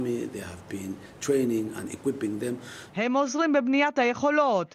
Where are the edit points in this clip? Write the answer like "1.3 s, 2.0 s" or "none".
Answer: 2.9 s

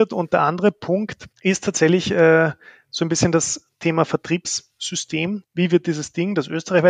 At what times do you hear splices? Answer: 1.3 s, 5.4 s

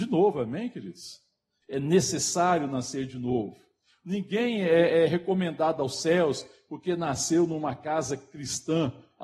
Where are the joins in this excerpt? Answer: 1.6 s

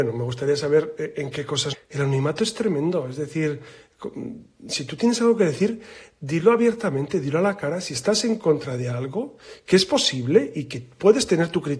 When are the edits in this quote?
1.7 s

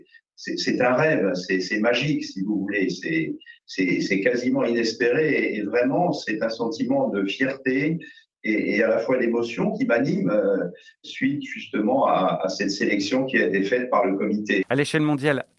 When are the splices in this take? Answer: 14.6 s

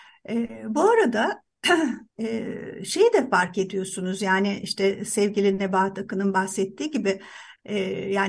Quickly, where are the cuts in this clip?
2.1 s

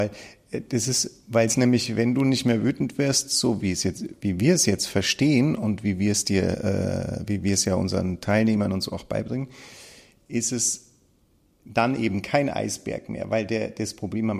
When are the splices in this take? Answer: none

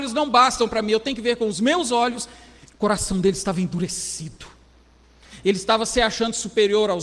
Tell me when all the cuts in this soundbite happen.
2.7 s

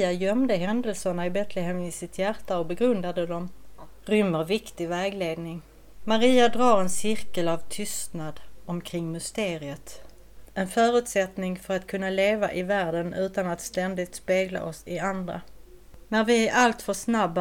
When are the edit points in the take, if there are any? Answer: 10.5 s, 16.0 s

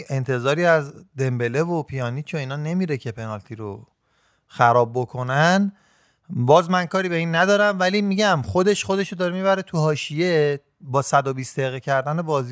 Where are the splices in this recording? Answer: none

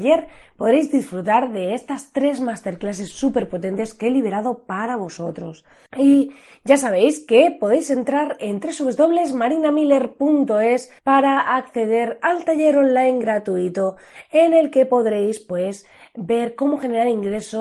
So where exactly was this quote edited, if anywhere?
5.9 s, 11.0 s

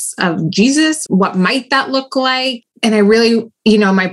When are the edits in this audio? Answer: 1.1 s, 2.6 s

